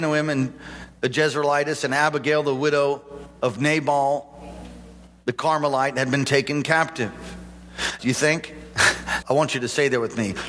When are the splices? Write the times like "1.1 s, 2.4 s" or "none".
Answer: 8.0 s, 9.2 s